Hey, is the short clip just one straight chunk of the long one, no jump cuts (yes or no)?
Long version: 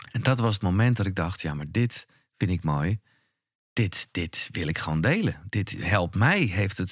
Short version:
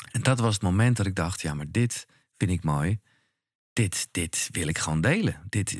yes